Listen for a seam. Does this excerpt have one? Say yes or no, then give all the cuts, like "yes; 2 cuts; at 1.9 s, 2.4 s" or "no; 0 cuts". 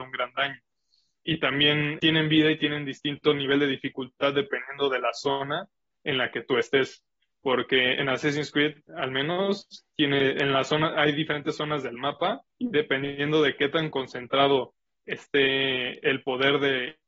yes; 3 cuts; at 2.0 s, 8.9 s, 12.5 s